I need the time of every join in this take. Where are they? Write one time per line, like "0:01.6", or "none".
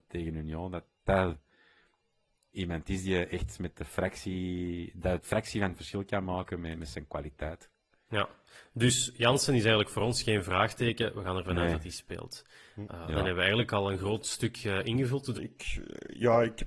0:01.0
0:15.3